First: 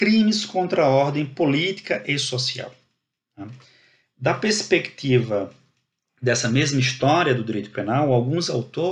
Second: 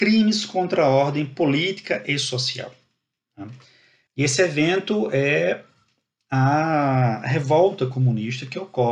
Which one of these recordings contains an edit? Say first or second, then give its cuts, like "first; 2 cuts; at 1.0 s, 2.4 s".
second; 1 cut; at 4.1 s